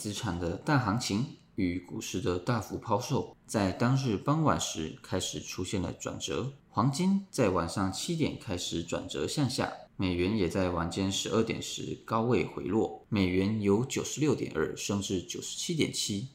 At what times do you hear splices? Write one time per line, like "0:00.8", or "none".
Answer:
0:13.1